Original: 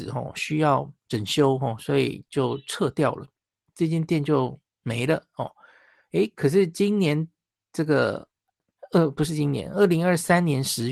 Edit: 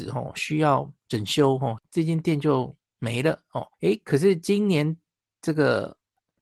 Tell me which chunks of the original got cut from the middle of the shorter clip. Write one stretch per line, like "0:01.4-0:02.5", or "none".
0:01.8-0:03.6
0:05.6-0:06.1